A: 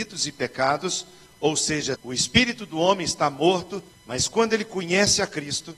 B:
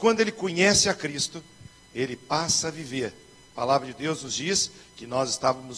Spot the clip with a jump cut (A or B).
A